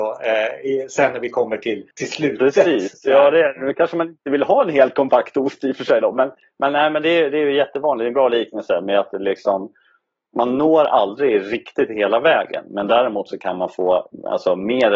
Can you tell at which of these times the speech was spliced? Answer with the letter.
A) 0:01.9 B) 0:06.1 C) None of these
A